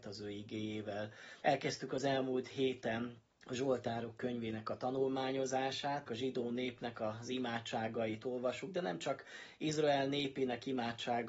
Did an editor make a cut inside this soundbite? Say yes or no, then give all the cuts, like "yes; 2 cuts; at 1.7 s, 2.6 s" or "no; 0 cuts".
yes; 3 cuts; at 1.4 s, 3.3 s, 6.1 s